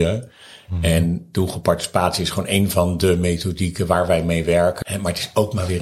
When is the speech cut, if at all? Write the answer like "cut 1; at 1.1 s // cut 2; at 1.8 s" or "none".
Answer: cut 1; at 4.8 s